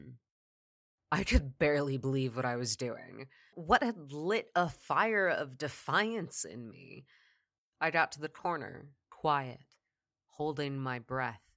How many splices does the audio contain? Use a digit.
3